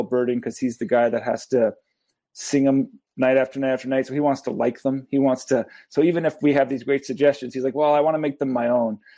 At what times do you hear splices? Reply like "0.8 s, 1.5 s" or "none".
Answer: none